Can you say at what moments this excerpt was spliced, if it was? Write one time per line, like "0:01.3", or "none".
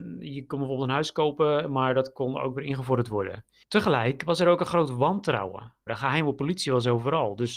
0:03.6
0:05.9